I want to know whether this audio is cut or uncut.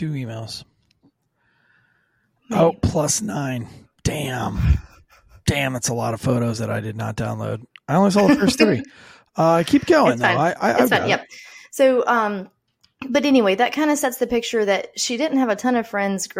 uncut